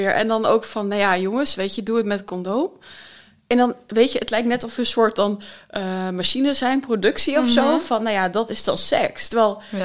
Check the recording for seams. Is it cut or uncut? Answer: uncut